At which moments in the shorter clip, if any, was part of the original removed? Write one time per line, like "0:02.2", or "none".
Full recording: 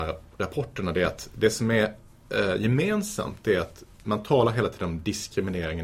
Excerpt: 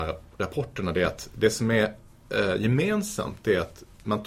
none